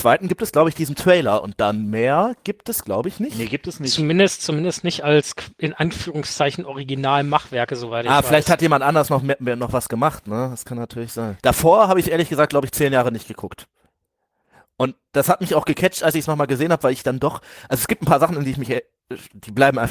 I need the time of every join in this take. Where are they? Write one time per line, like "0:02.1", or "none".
0:11.4